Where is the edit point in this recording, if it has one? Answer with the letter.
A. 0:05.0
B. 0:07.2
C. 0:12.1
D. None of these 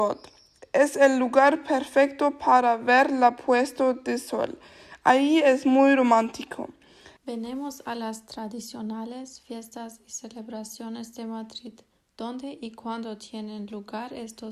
B